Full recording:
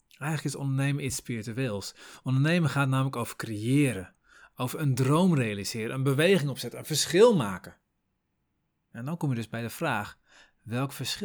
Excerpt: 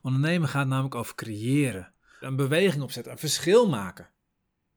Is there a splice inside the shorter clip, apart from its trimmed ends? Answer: yes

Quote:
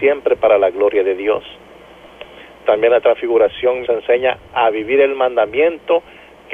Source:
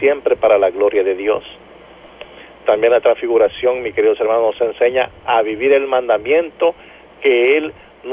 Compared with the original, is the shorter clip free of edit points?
no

